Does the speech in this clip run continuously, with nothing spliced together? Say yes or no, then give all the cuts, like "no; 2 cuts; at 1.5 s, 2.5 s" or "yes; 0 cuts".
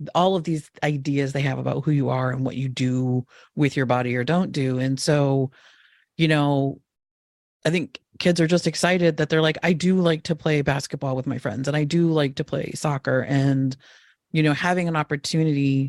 yes; 0 cuts